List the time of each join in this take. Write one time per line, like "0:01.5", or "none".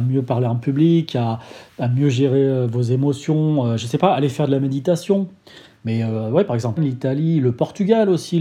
0:05.7
0:06.8